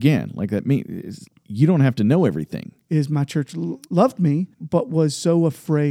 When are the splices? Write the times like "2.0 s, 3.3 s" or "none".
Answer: 1.3 s, 2.9 s, 4.5 s